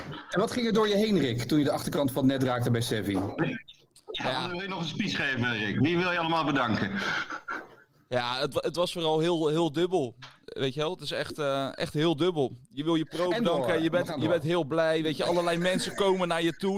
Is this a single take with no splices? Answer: yes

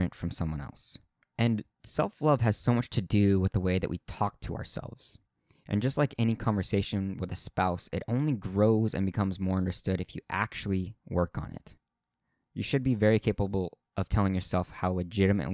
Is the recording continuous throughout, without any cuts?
no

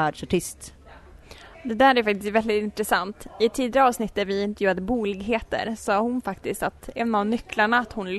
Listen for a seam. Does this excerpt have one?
no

